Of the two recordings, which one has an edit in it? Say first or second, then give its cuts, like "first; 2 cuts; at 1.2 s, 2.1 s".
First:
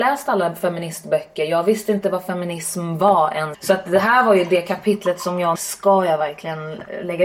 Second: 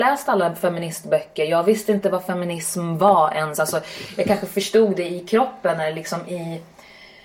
first; 2 cuts; at 3.5 s, 5.6 s